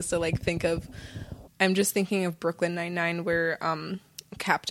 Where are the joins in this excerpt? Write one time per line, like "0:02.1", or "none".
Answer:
0:01.5